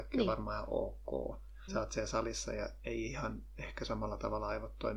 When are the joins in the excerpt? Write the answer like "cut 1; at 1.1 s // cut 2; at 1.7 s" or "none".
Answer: cut 1; at 1.7 s